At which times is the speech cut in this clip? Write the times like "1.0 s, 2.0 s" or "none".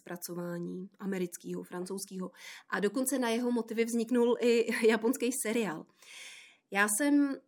none

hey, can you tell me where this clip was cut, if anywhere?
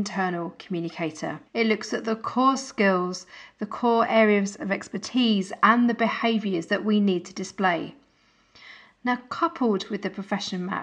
1.5 s

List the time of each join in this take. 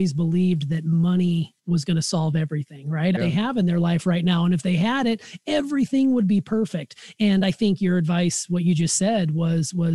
1.6 s, 3.2 s

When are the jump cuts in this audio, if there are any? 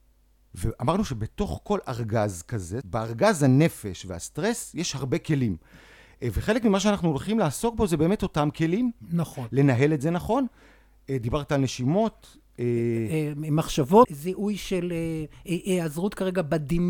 2.8 s, 14.0 s

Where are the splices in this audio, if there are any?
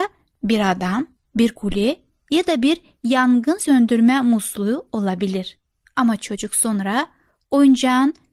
1.2 s, 5.8 s

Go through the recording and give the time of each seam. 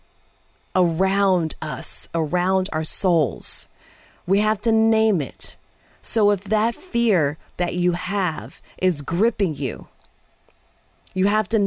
2.1 s

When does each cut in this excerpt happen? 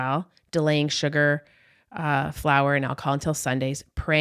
none

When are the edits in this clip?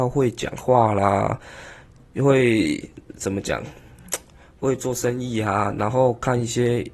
none

